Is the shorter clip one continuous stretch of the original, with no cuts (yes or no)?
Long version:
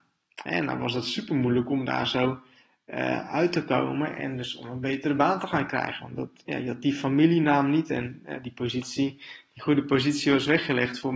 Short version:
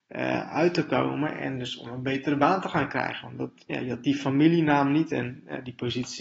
yes